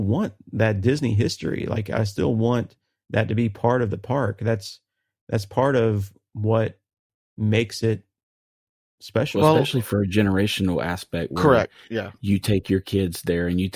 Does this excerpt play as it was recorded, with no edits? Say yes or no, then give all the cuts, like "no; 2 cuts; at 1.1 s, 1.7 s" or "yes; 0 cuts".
yes; 0 cuts